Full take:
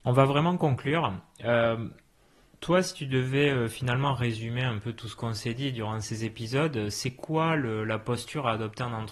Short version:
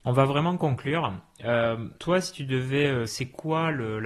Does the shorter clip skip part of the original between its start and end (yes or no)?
yes